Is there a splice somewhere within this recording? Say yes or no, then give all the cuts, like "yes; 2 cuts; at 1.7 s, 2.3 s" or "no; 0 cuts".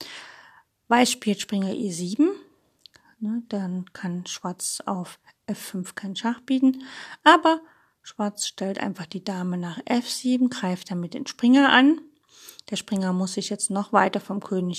no; 0 cuts